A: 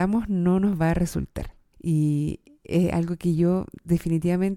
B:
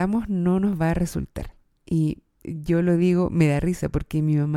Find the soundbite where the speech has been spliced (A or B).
A